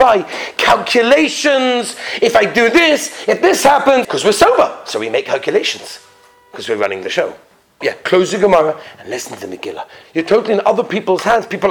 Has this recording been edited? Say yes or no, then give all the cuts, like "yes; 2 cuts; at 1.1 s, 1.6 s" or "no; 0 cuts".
yes; 3 cuts; at 4.0 s, 7.8 s, 10.0 s